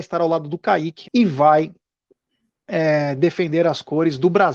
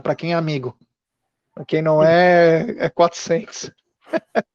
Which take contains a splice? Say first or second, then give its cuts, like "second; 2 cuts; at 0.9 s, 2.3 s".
first; 1 cut; at 1.0 s